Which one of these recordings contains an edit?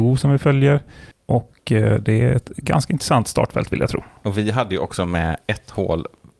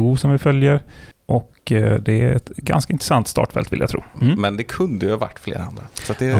second; 1 cut; at 4.1 s

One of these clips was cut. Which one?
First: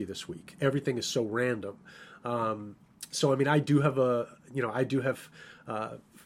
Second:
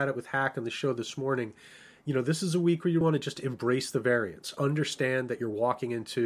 second; 1 cut; at 3.0 s

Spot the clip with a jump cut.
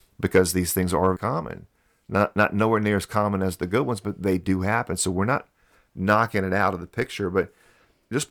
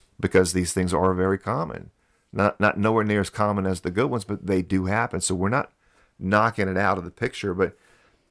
first; 1 cut; at 1.1 s

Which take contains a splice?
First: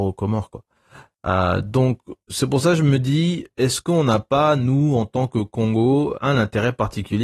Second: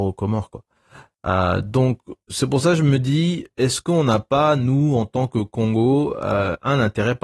first; 1 cut; at 6.2 s

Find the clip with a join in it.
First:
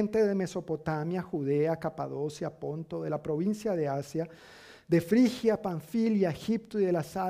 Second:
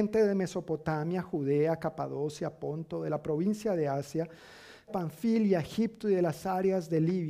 second; 1 cut; at 4.9 s

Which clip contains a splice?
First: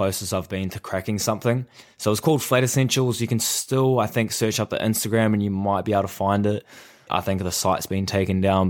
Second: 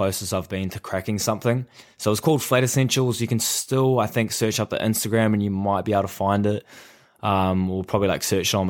first; 1 cut; at 7.1 s

